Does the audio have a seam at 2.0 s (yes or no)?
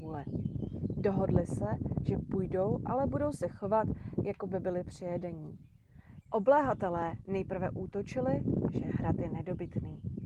no